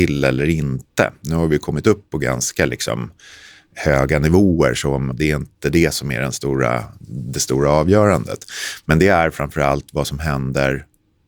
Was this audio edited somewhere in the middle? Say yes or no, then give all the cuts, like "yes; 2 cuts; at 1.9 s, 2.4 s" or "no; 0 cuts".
yes; 1 cut; at 5.1 s